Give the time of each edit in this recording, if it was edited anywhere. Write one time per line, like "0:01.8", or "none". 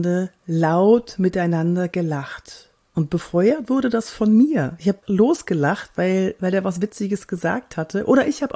0:05.0

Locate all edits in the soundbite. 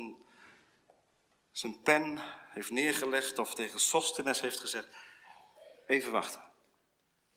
none

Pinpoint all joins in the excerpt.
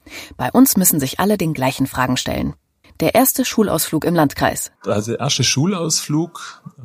0:02.8
0:04.8

